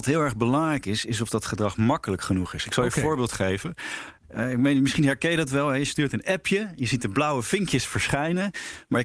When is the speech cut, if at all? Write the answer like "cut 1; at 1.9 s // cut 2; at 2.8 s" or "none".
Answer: none